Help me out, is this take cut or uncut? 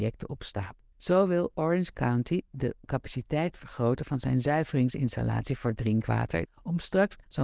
cut